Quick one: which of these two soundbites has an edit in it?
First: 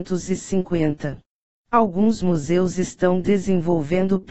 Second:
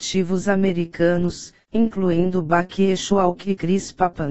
first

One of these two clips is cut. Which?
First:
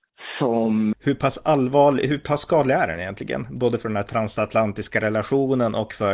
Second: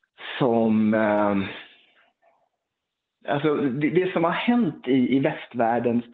first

